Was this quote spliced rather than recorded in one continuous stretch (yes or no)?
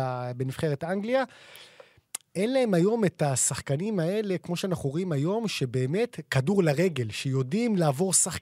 no